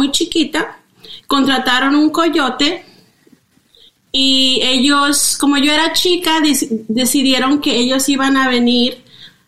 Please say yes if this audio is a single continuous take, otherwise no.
yes